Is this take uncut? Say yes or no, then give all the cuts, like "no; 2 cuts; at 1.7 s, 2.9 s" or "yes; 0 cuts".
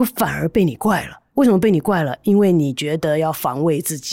yes; 0 cuts